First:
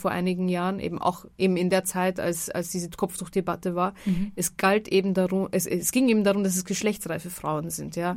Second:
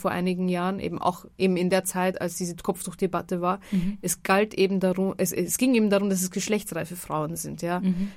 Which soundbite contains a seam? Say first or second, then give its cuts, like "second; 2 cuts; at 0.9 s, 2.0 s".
second; 1 cut; at 2.1 s